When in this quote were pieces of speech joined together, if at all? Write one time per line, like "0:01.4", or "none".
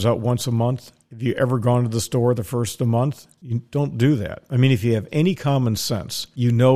none

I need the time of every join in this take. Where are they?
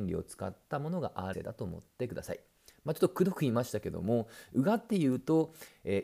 0:01.3

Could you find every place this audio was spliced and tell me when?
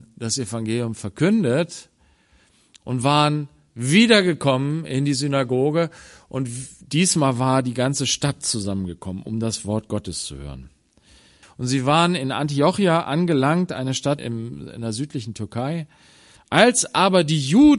0:11.4
0:14.2
0:16.4

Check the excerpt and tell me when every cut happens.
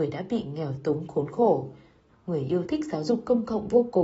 0:02.1

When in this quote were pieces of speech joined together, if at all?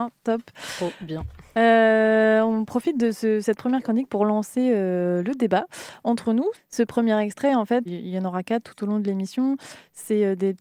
0:06.5
0:07.9

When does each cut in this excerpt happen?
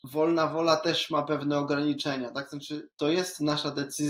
none

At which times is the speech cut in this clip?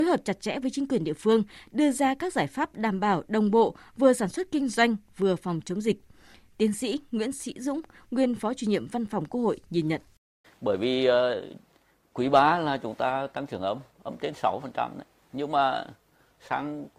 0:10.4

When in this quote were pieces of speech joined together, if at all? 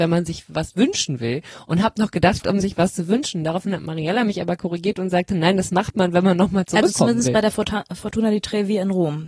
0:02.4

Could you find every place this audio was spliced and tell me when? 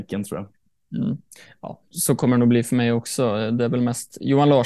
0:01.9

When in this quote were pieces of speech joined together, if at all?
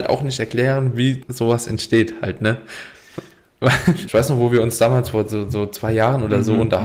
0:04.0

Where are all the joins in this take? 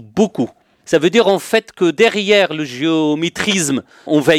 none

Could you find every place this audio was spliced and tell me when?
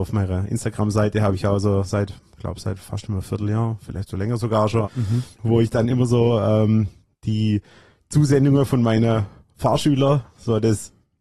0:04.8

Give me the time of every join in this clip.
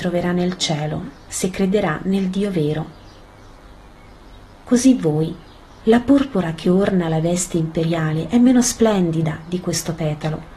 0:05.8

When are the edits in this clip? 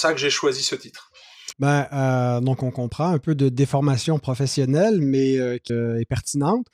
0:01.5
0:05.7

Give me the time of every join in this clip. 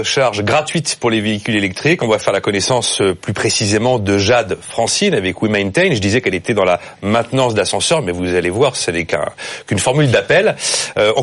none

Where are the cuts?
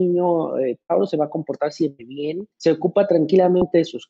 0:02.5

